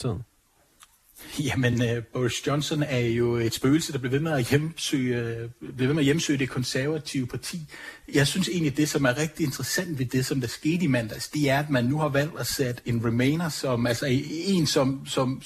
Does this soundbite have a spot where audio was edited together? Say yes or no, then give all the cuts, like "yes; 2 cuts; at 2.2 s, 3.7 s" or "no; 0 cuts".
no; 0 cuts